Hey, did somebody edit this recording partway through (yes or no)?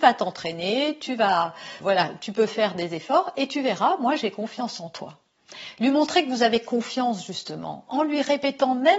yes